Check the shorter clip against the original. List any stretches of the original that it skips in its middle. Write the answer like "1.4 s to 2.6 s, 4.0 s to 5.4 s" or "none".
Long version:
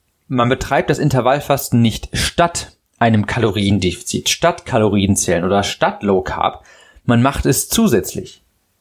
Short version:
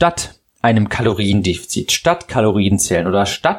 none